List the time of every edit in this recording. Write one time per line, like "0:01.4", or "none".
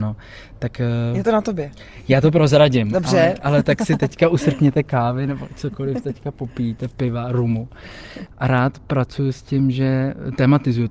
none